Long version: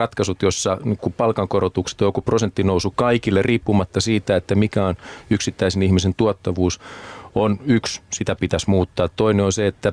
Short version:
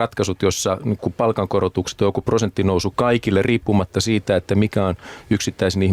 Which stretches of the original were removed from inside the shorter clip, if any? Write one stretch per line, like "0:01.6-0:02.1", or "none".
none